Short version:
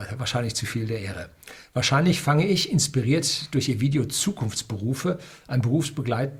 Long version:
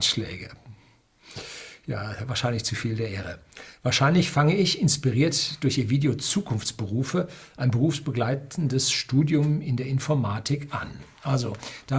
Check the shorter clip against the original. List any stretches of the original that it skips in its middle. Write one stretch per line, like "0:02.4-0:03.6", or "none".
none